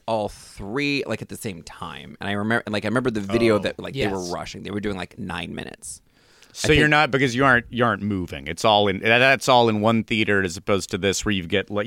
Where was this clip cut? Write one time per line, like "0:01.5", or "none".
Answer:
none